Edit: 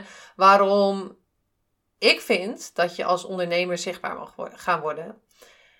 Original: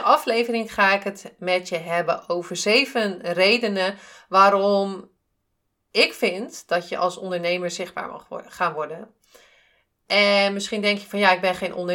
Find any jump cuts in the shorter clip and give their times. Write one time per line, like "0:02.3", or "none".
none